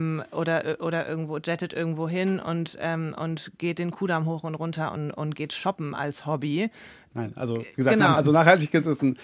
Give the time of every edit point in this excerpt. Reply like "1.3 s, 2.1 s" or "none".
7.1 s